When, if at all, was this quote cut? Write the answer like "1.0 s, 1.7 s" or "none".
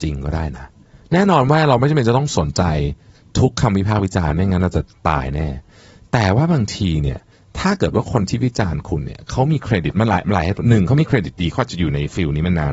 none